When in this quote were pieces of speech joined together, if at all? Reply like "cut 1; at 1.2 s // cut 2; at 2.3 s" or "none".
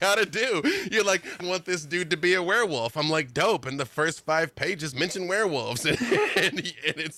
cut 1; at 1.4 s